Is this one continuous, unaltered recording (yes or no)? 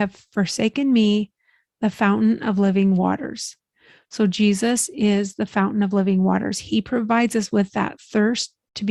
yes